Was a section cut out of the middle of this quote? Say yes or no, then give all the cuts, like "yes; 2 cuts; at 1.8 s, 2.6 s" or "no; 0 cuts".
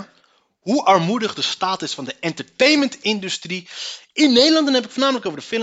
no; 0 cuts